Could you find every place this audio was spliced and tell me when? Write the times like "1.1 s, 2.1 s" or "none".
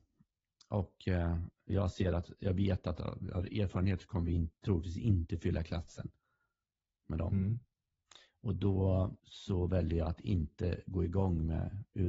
9.2 s